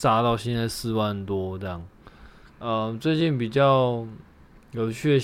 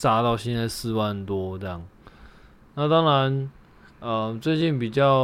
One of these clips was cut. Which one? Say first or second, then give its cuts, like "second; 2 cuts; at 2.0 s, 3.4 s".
first; 1 cut; at 2.4 s